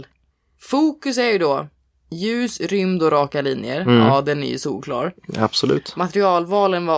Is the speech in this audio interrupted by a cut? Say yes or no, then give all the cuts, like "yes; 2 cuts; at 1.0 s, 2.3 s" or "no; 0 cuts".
no; 0 cuts